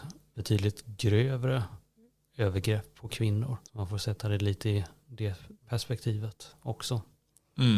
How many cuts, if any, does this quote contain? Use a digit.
1